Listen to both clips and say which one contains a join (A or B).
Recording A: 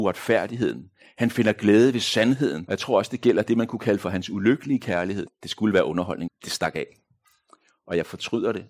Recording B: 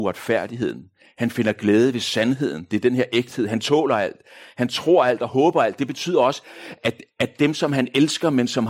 A